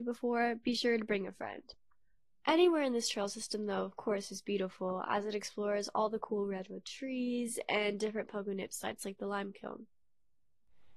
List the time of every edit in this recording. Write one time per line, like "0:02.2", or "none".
none